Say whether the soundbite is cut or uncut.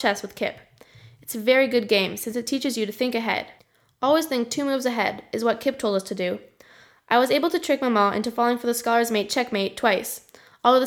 uncut